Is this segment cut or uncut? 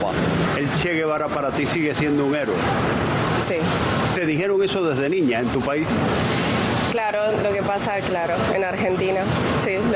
uncut